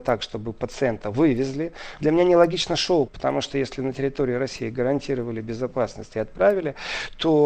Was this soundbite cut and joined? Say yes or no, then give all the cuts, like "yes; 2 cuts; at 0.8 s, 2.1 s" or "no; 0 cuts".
yes; 2 cuts; at 2.0 s, 3.1 s